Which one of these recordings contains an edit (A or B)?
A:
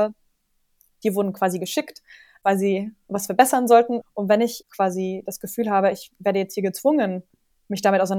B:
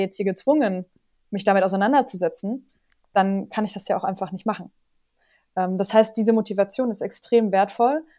A